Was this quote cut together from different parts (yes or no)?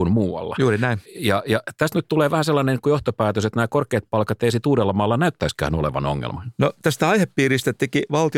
no